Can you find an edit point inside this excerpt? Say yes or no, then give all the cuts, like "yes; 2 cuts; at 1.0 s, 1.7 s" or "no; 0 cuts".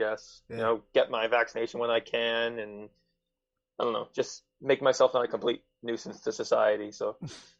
no; 0 cuts